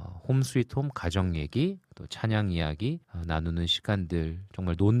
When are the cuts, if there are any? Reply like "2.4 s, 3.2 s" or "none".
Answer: 1.9 s, 3.0 s